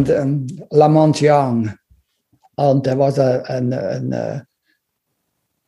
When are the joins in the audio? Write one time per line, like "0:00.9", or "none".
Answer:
none